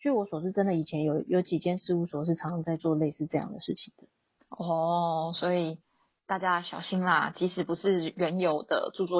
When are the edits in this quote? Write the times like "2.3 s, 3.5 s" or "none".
none